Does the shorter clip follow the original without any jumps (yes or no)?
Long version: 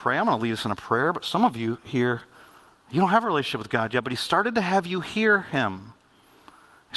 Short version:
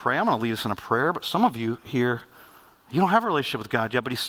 yes